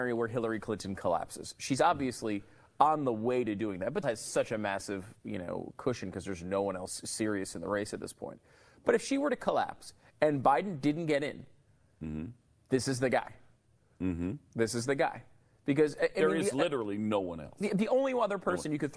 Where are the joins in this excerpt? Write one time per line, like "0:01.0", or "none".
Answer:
0:04.0